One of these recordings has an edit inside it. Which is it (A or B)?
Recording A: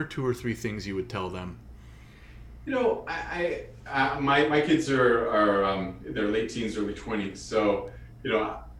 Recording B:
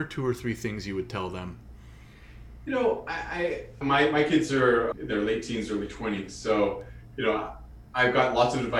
B